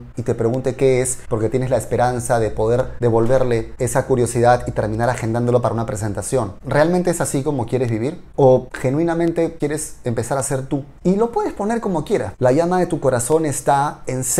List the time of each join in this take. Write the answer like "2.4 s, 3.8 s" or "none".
11.0 s, 12.3 s